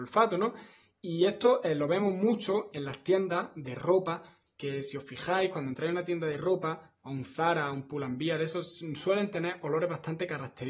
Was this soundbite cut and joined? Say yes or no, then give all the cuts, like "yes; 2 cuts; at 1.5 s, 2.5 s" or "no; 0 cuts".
yes; 1 cut; at 2.7 s